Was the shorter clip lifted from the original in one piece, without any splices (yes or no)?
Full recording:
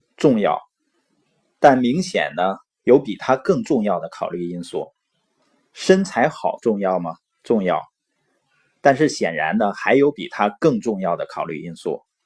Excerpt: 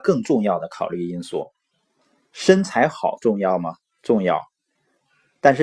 yes